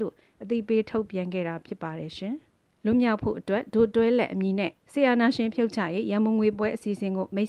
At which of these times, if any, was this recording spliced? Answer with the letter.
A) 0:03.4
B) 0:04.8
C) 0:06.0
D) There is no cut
B